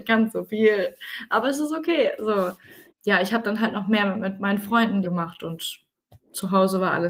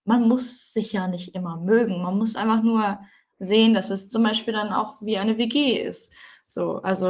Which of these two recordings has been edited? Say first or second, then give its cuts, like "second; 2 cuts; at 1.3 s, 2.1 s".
first; 2 cuts; at 2.9 s, 5.0 s